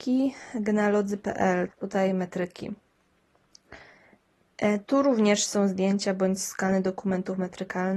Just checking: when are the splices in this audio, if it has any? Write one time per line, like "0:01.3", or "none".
0:01.7